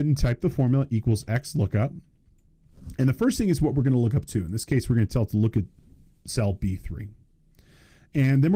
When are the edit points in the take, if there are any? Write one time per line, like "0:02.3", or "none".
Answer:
none